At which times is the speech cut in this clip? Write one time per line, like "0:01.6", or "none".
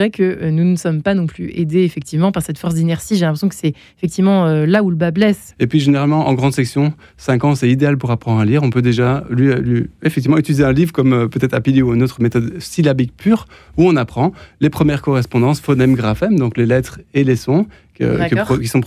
0:05.5